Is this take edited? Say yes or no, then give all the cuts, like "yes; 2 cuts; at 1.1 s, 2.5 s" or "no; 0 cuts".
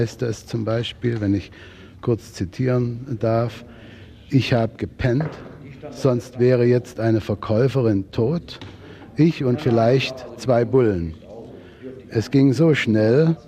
no; 0 cuts